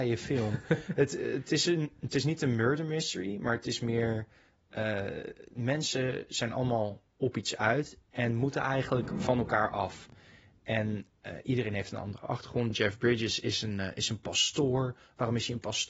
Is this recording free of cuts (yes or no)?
yes